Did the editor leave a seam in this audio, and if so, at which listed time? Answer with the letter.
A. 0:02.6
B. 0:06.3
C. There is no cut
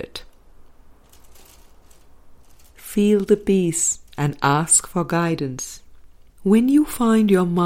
B